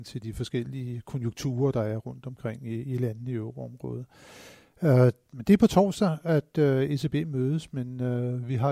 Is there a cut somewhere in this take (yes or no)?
no